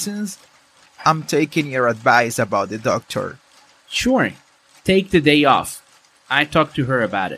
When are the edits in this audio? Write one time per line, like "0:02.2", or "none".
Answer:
none